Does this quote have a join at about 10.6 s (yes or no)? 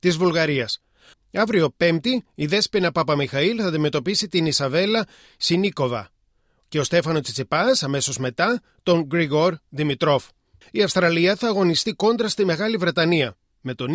yes